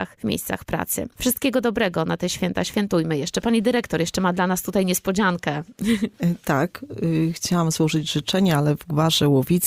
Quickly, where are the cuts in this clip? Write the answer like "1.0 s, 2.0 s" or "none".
none